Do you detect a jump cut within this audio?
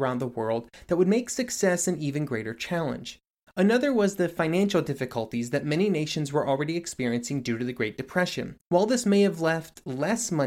yes; 2 cuts; at 3.5 s, 8.6 s

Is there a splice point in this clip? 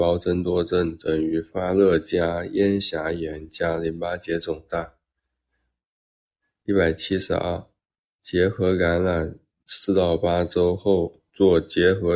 no; 0 cuts

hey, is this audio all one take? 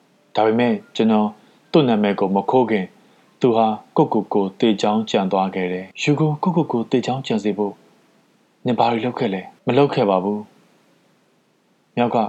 no; 2 cuts; at 5.9 s, 9.6 s

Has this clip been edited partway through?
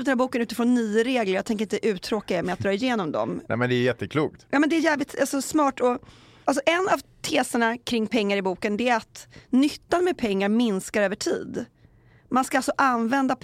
no; 0 cuts

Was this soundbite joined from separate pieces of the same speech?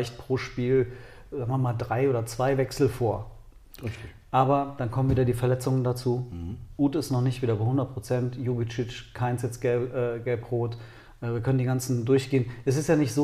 no; 0 cuts

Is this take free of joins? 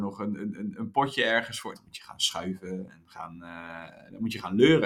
no; 1 cut; at 1.7 s

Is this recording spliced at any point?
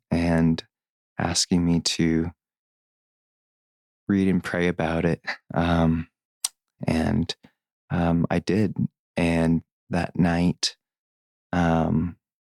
yes; 1 cut; at 6.8 s

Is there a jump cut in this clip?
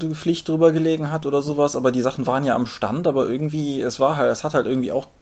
no; 0 cuts

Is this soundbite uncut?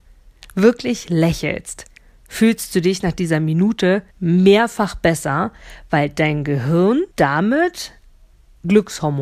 no; 2 cuts; at 4.1 s, 7.1 s

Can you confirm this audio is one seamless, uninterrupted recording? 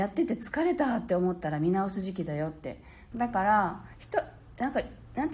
no; 1 cut; at 3.1 s

